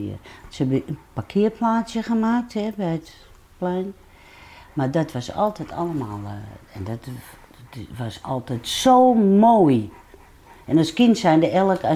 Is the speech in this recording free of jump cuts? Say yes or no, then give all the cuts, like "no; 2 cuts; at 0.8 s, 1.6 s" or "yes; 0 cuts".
yes; 0 cuts